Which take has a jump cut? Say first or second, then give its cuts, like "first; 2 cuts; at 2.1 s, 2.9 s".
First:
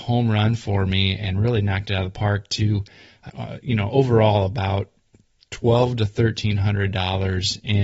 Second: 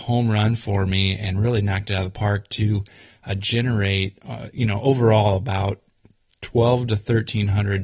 first; 1 cut; at 3.3 s